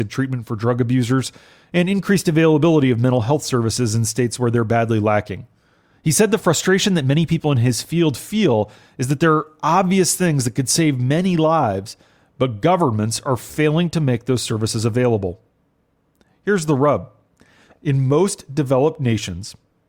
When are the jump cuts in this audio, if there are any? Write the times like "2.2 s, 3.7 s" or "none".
none

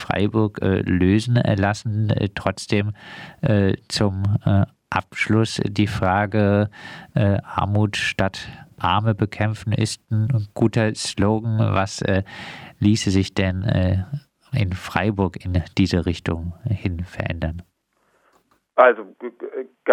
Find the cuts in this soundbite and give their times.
none

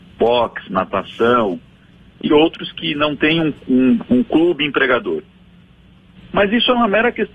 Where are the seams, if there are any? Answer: 6.1 s

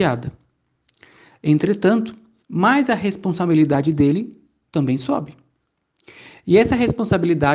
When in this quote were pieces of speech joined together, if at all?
2.4 s

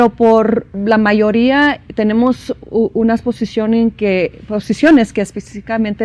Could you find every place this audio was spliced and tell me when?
none

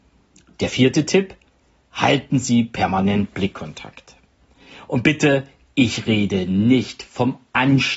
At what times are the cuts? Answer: none

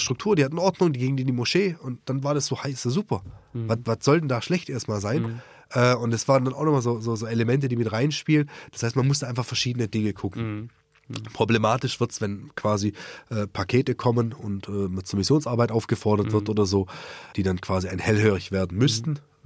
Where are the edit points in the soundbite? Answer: 17.3 s

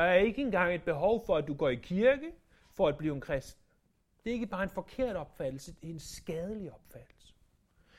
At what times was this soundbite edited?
4.2 s

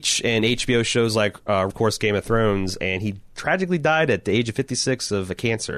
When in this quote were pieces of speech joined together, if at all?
1.7 s

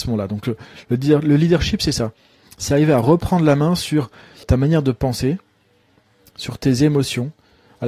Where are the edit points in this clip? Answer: 4.4 s

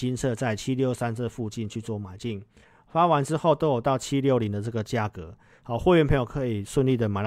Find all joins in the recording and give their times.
none

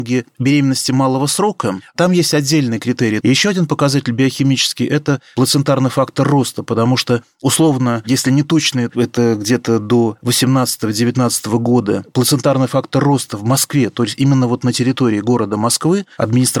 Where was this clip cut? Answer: 3.2 s, 8.9 s

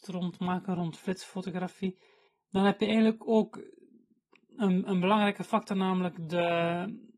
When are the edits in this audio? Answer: none

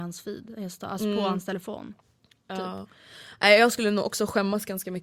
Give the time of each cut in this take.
none

